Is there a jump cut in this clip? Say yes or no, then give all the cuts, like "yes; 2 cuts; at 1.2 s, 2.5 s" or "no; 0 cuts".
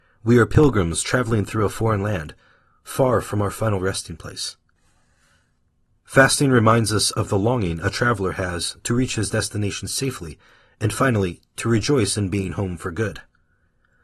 no; 0 cuts